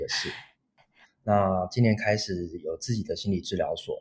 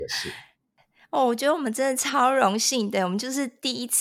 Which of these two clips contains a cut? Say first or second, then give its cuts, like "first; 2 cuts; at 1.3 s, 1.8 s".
first; 1 cut; at 1.0 s